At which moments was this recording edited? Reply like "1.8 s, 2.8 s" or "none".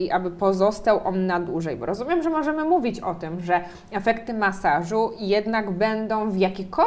none